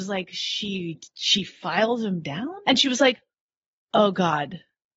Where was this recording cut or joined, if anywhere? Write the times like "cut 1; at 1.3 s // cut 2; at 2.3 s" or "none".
cut 1; at 1.1 s // cut 2; at 2.6 s